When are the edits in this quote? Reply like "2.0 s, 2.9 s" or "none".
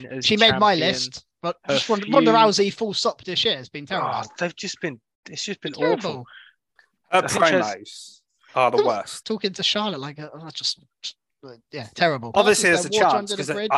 9.2 s, 12.3 s

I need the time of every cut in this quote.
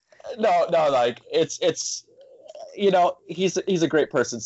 none

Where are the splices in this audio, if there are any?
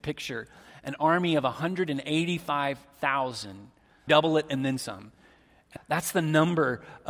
4.1 s, 5.8 s

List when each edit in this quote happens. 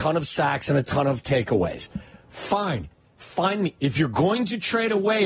3.2 s

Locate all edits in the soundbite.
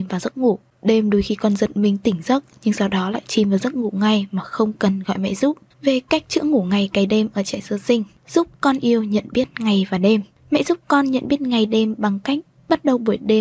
5.7 s

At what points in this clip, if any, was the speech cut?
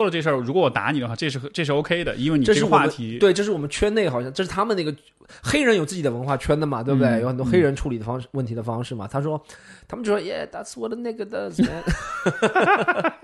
none

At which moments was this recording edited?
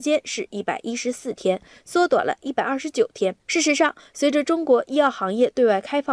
3.4 s

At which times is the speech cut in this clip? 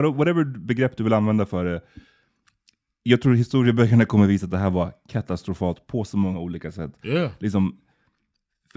none

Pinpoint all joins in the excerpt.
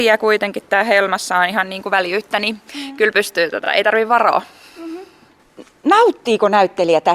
none

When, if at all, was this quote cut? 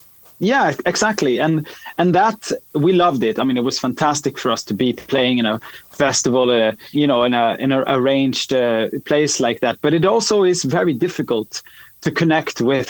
6.9 s

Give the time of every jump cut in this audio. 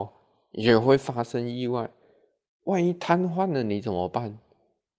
none

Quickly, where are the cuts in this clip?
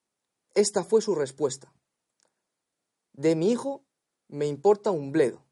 4.1 s

